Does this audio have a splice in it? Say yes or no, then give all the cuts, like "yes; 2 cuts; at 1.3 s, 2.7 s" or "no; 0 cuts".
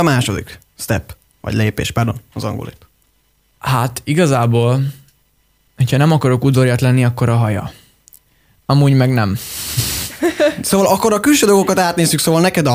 no; 0 cuts